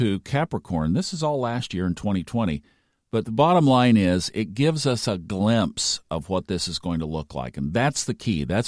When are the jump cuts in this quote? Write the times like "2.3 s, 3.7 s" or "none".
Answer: none